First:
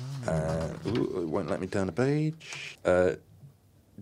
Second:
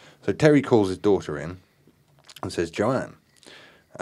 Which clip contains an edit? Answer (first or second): first